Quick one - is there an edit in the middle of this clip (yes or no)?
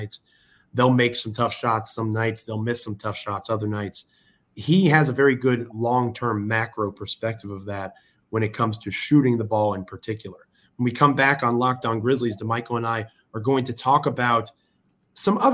no